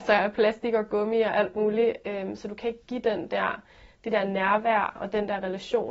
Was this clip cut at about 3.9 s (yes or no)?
no